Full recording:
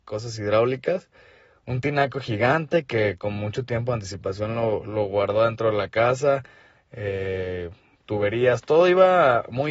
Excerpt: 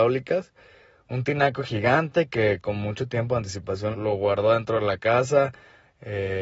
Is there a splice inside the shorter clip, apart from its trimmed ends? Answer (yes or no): yes